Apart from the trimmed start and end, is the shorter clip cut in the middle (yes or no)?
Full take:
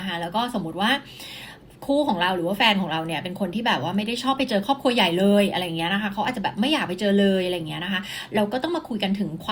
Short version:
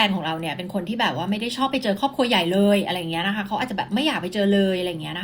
no